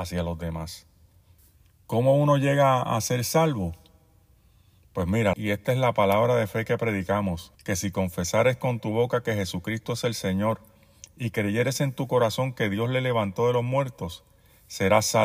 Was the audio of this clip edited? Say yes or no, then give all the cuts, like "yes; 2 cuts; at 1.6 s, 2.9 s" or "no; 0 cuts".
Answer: yes; 2 cuts; at 5.3 s, 7.6 s